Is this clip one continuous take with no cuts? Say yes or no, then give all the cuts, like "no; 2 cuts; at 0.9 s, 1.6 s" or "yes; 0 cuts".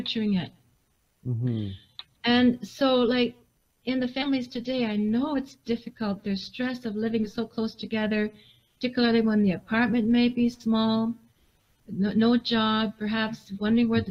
yes; 0 cuts